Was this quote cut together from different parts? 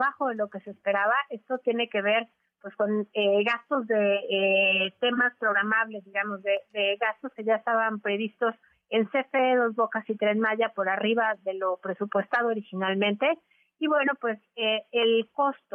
no; 0 cuts

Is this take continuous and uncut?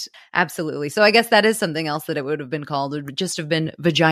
yes; 0 cuts

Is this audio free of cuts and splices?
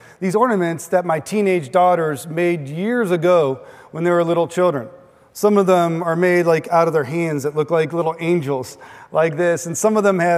yes; 0 cuts

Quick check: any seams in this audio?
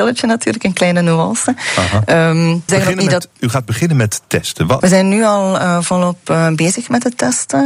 yes; 2 cuts; at 2.7 s, 4.8 s

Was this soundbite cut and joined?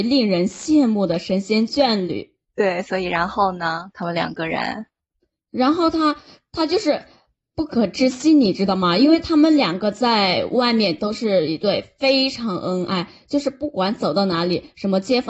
yes; 1 cut; at 2.5 s

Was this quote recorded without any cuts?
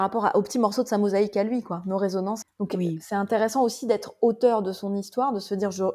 no; 1 cut; at 2.4 s

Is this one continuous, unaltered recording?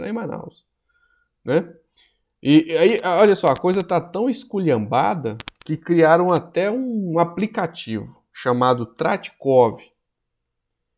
yes; 0 cuts

